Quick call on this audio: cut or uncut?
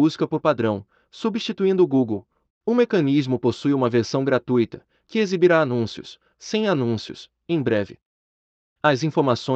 cut